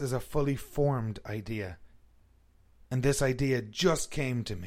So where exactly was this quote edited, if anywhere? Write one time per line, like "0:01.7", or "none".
none